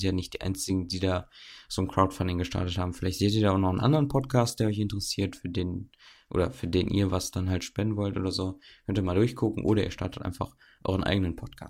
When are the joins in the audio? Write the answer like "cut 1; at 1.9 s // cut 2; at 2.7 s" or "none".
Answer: none